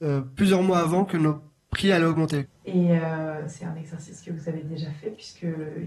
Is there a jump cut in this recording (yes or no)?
yes